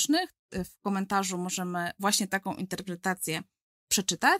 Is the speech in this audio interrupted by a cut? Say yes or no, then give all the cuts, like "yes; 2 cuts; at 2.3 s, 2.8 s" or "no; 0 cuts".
no; 0 cuts